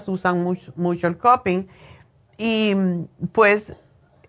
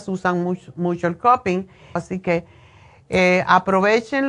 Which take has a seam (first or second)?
second